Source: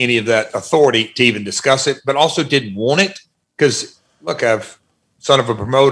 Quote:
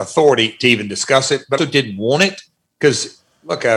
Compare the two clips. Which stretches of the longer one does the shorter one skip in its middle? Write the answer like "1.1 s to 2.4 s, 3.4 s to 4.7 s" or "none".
2.1 s to 2.4 s